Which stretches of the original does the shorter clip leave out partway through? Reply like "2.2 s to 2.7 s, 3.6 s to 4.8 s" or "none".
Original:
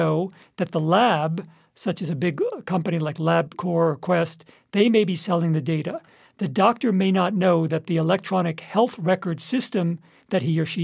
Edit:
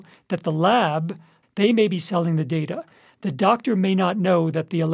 1.7 s to 4.6 s